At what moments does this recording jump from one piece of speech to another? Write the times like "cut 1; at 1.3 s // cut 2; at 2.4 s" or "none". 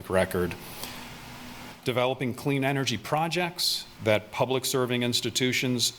cut 1; at 1.8 s // cut 2; at 4.0 s